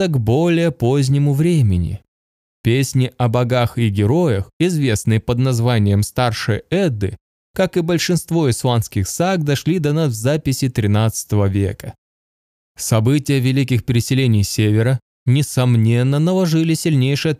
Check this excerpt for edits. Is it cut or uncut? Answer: uncut